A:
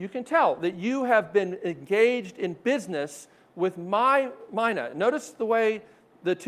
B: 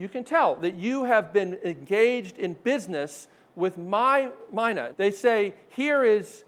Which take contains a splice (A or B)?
B